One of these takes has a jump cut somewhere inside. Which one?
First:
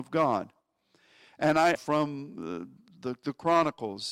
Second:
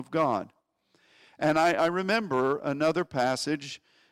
first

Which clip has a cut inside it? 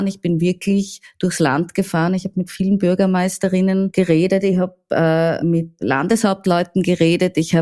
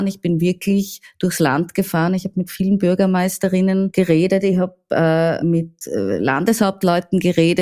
first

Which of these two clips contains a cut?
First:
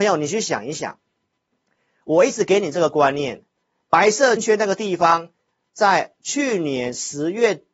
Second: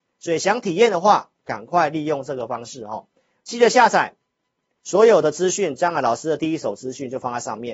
first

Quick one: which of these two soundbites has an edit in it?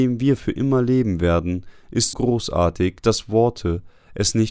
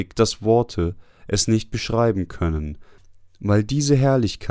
first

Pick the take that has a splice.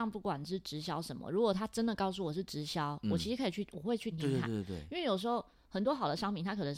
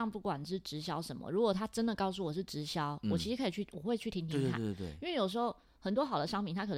first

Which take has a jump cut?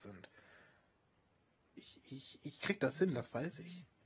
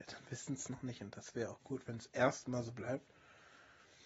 first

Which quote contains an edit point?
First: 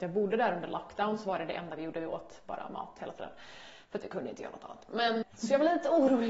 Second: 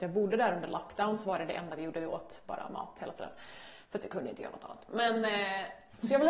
first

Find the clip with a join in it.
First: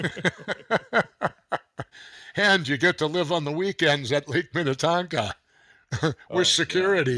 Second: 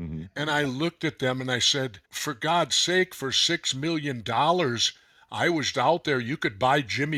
second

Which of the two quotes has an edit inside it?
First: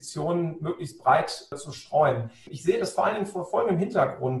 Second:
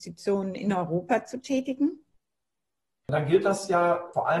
second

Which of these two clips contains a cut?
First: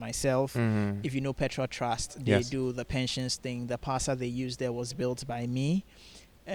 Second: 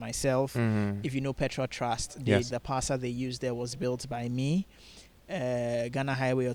second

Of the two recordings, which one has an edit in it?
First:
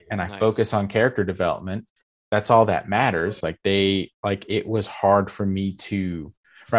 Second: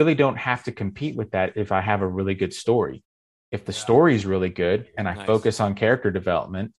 first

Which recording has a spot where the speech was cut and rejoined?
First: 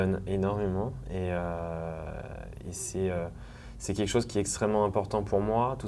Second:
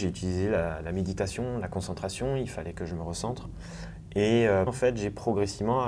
second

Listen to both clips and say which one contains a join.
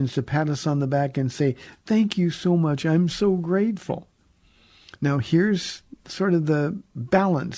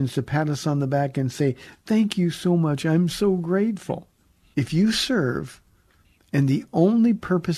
second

